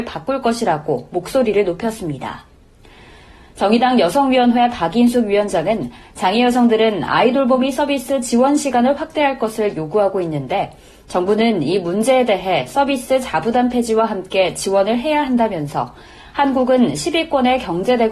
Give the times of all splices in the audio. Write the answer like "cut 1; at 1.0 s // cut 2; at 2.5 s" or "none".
none